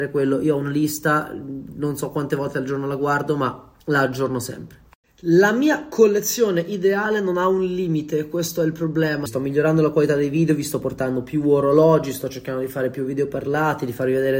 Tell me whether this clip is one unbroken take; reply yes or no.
no